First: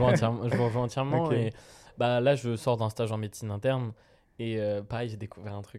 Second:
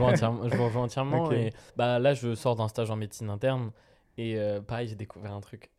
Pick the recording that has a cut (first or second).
second